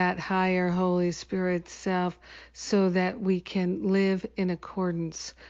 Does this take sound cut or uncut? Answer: uncut